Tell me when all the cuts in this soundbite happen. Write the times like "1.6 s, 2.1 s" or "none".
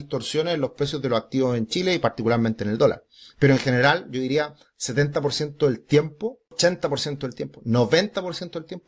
none